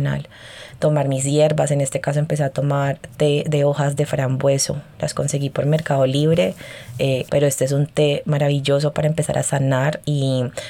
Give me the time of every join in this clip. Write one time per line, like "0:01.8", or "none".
0:07.3